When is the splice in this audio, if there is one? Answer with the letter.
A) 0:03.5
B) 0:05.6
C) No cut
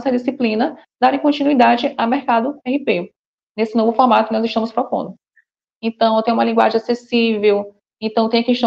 B